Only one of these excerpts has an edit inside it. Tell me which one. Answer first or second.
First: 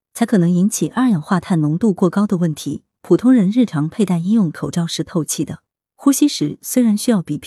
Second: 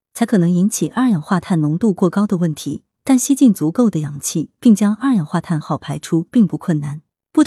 second